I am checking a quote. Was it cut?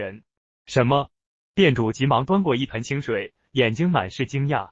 yes; 2 cuts; at 1.4 s, 3.5 s

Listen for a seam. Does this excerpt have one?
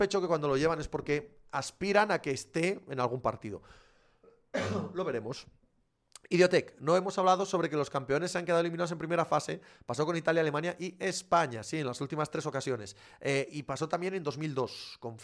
no; 0 cuts

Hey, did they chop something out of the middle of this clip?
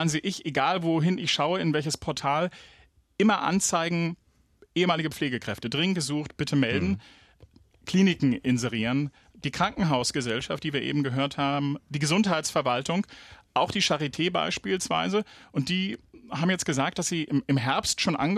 no; 0 cuts

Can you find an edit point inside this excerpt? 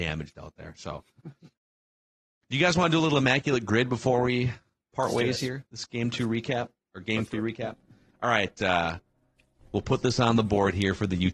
no; 0 cuts

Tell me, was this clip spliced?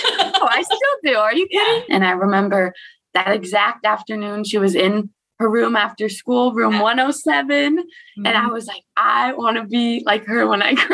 yes; 1 cut; at 1.9 s

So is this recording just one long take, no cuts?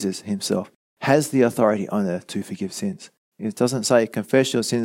no; 1 cut; at 3.3 s

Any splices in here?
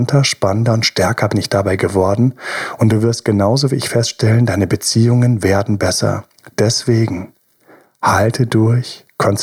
no; 0 cuts

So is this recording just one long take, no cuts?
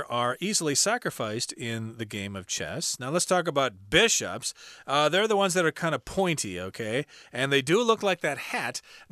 yes; 0 cuts

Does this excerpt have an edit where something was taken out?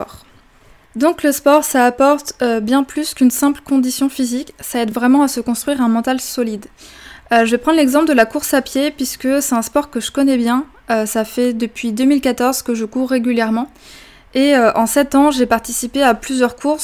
no; 0 cuts

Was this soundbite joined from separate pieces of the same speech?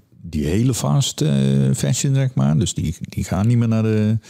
no; 0 cuts

